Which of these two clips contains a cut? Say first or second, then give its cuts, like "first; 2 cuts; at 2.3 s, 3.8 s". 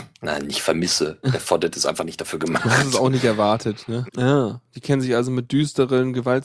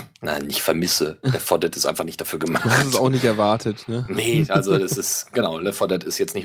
first; 1 cut; at 4.1 s